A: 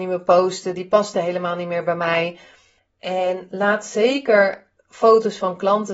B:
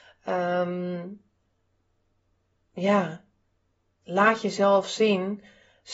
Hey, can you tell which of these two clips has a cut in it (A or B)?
A